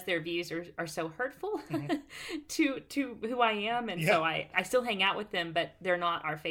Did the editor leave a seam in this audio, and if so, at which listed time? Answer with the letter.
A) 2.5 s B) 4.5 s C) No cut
B